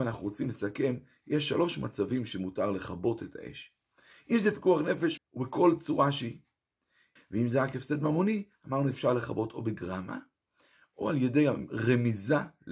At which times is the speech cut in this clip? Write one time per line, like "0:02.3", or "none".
0:05.2
0:07.2